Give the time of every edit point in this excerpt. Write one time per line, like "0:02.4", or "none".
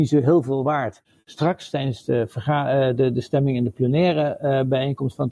none